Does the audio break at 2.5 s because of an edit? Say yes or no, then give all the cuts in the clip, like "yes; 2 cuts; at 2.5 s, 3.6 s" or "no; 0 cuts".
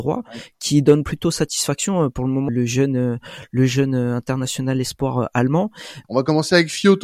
yes; 2 cuts; at 2.5 s, 6.0 s